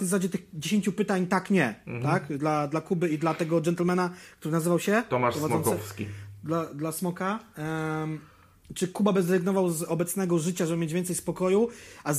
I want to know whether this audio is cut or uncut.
uncut